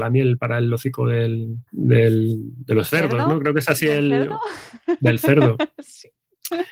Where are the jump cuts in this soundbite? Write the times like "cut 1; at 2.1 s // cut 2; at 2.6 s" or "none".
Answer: cut 1; at 1.7 s